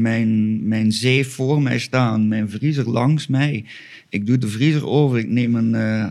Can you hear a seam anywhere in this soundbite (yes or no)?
no